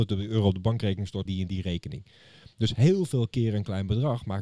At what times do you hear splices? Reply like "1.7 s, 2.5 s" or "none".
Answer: 1.3 s